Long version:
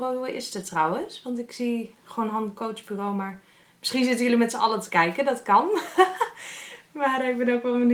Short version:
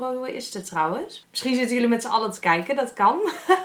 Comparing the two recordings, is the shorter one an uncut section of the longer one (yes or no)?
no